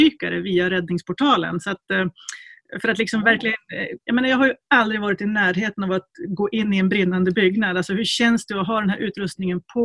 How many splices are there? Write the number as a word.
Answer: one